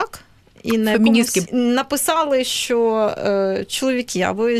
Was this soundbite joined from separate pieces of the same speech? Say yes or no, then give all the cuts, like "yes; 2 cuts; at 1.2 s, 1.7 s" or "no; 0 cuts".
yes; 1 cut; at 1.5 s